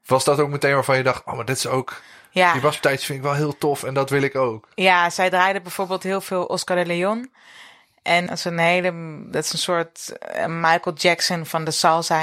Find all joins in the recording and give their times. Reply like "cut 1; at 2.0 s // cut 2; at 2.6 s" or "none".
cut 1; at 8.3 s